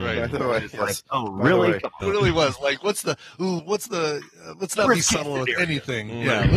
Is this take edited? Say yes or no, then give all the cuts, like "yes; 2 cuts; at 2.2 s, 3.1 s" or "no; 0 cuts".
yes; 2 cuts; at 2.0 s, 3.6 s